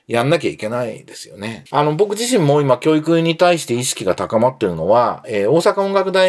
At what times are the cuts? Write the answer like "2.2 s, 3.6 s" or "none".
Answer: 1.7 s